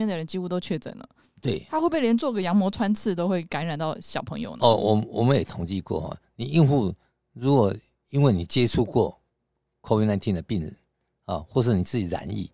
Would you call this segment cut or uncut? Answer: uncut